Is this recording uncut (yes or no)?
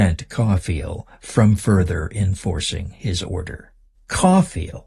no